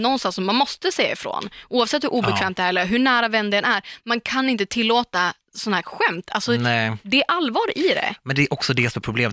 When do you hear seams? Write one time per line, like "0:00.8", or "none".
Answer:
none